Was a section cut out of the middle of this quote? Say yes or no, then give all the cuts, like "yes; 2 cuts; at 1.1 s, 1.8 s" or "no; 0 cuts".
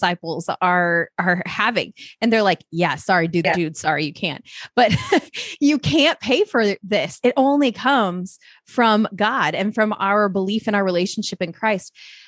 yes; 1 cut; at 3.4 s